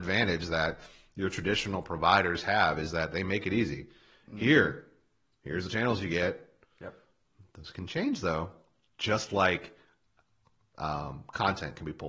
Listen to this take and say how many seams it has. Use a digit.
0